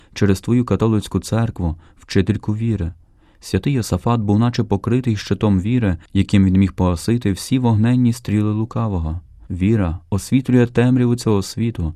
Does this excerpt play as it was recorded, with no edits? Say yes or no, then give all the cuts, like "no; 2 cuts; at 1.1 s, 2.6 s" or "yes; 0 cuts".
yes; 0 cuts